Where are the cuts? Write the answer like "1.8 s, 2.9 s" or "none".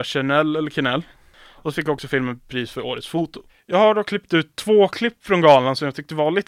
none